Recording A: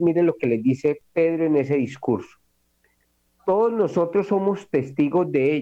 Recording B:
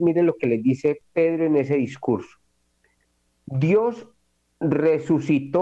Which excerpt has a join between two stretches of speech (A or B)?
A